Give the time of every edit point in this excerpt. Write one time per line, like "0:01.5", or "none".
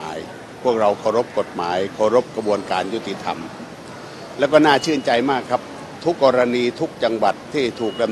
0:06.2